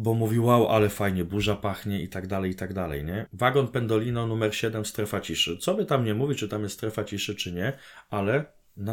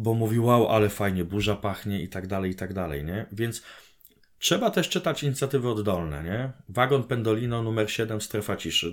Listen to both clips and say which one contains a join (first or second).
first